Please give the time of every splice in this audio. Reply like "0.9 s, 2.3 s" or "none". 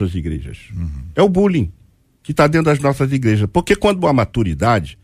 none